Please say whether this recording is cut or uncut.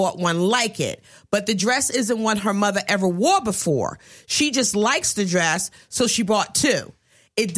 uncut